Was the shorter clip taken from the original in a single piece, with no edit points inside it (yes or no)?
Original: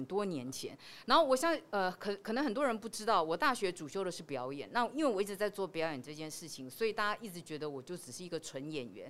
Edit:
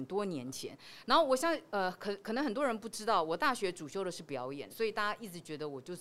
no